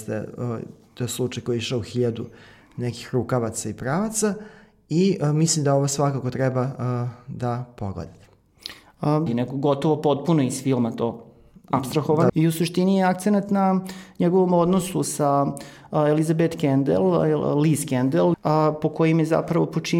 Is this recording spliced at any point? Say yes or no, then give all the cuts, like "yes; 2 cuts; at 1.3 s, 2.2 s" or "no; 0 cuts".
yes; 3 cuts; at 9.3 s, 12.3 s, 18.3 s